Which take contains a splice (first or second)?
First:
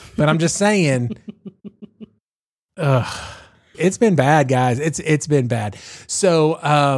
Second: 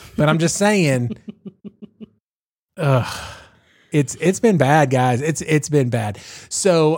first